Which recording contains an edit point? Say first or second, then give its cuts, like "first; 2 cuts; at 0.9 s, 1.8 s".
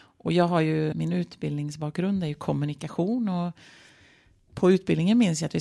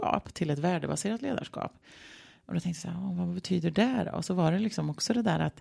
first; 1 cut; at 0.9 s